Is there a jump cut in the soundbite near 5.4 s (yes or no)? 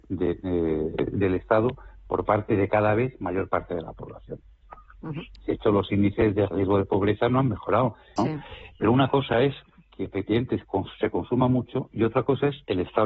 yes